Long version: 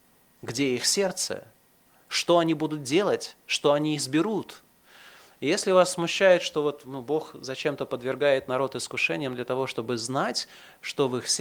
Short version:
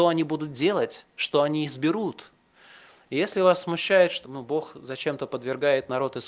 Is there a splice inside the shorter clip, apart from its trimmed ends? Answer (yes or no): yes